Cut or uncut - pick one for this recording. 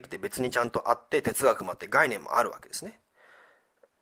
cut